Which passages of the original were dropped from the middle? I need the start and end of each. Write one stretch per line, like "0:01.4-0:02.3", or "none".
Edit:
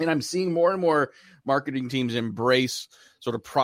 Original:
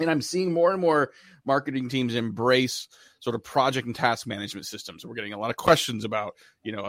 none